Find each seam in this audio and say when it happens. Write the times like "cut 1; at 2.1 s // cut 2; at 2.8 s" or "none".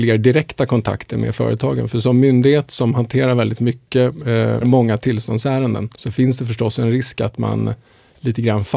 cut 1; at 4.6 s // cut 2; at 5.9 s